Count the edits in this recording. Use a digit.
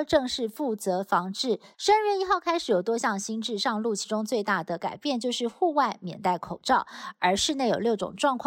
1